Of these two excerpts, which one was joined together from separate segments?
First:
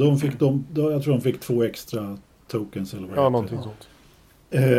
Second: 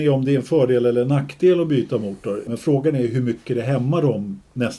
second; 1 cut; at 2.5 s

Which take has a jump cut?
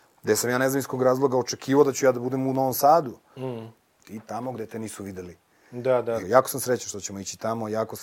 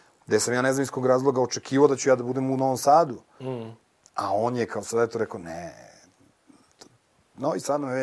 first; 2 cuts; at 4.0 s, 6.2 s

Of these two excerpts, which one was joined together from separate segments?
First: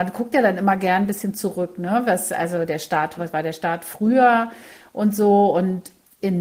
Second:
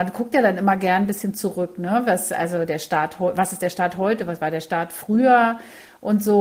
first; 1 cut; at 3.2 s

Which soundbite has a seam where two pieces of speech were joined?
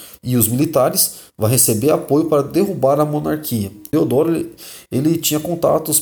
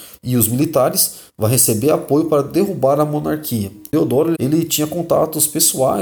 second; 1 cut; at 4.3 s

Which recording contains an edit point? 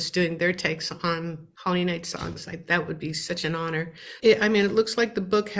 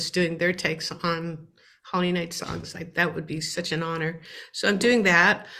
first; 2 cuts; at 1.5 s, 4.2 s

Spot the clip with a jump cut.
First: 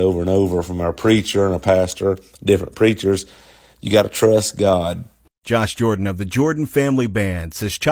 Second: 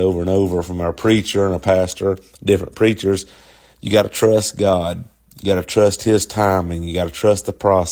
first; 1 cut; at 5.2 s

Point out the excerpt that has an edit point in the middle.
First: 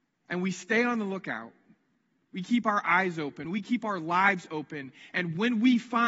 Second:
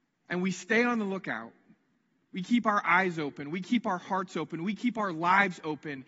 first; 1 cut; at 3.4 s

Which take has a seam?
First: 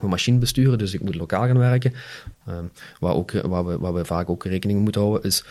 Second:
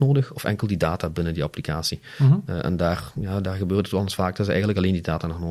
first; 1 cut; at 2.3 s

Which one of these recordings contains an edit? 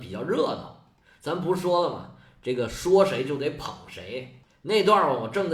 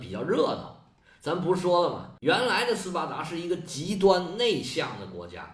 second; 1 cut; at 2.2 s

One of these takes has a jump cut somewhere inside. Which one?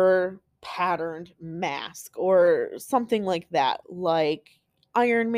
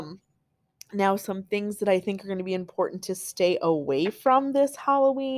first; 1 cut; at 3.8 s

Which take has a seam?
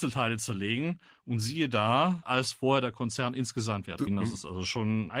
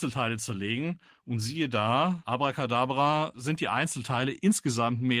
first; 2 cuts; at 2.2 s, 4.1 s

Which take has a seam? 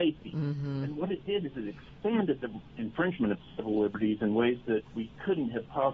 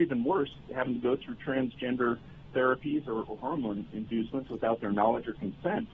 first; 1 cut; at 2.7 s

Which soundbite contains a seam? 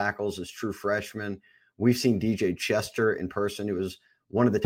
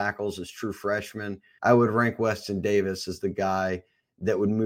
second; 1 cut; at 1.6 s

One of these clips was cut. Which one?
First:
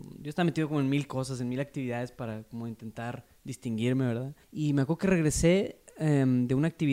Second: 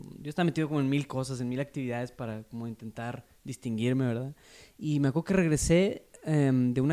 first; 1 cut; at 4.4 s

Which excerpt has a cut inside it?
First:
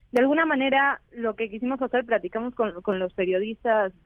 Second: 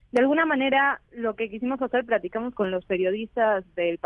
second; 1 cut; at 2.5 s

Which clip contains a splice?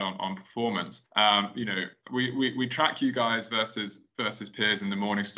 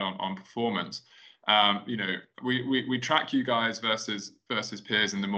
first; 1 cut; at 1.1 s

